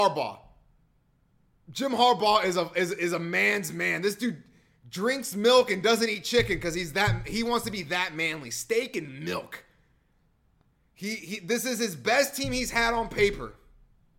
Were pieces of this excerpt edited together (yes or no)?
no